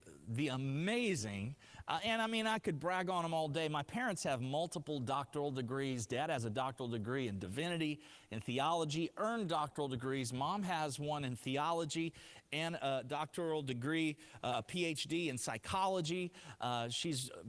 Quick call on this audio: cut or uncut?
uncut